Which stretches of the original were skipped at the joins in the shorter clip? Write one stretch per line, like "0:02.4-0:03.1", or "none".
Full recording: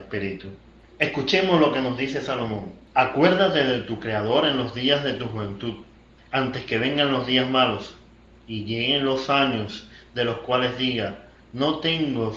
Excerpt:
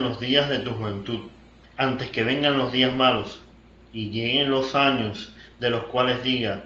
none